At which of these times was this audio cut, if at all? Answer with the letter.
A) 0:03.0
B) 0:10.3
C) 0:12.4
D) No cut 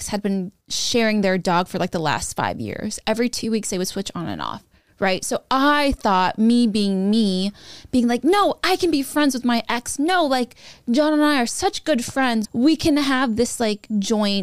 C